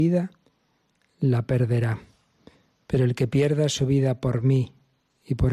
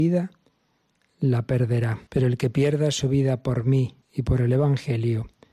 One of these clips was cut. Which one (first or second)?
second